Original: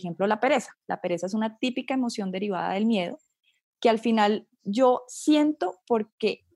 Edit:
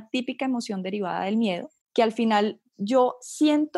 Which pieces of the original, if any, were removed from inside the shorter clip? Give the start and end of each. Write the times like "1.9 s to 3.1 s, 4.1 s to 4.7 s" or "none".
3.3 s to 3.7 s

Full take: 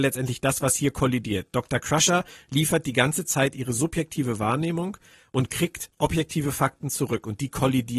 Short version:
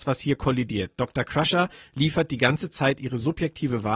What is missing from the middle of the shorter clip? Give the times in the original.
none

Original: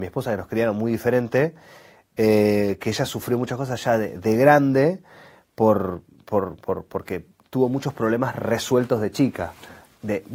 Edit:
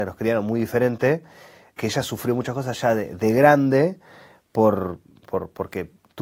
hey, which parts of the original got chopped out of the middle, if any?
2.1 s to 2.8 s, 6.2 s to 6.6 s

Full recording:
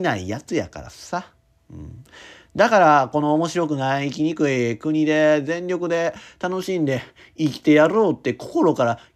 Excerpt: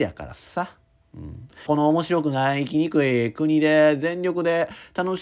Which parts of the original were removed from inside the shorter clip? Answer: 2.2 s to 3.1 s

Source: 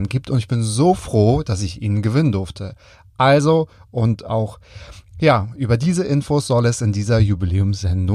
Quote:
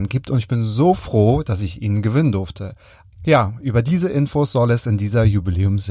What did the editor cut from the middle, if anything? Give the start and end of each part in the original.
3.1 s to 5.1 s

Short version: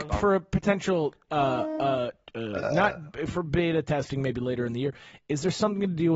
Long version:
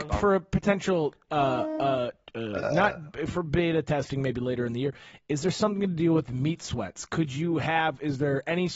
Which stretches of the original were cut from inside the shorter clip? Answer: none

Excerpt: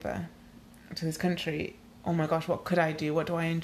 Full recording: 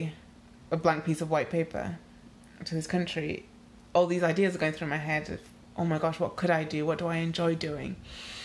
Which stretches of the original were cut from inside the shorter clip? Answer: 3.6 s to 5.6 s

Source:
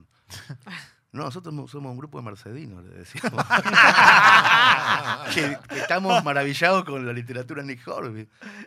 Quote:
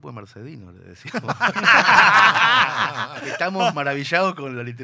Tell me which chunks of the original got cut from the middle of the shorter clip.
5.3 s to 5.7 s

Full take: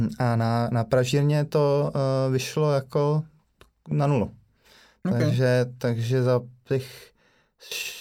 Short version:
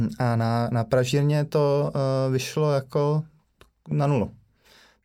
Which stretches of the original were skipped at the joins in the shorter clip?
none

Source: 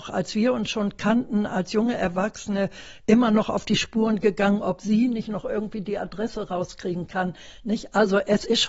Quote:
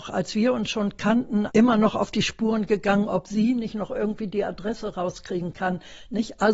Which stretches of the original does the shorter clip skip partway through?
1.5 s to 3.0 s

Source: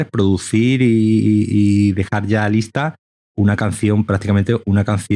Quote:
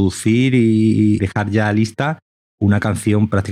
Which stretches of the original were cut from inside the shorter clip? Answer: 1.5 s to 2.0 s

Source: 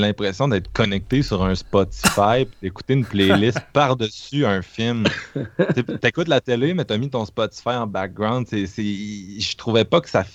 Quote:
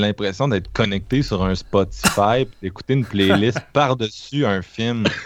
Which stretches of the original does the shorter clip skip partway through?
none

